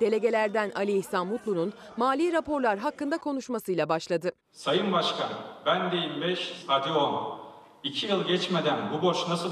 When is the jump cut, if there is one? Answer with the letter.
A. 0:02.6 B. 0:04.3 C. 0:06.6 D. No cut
C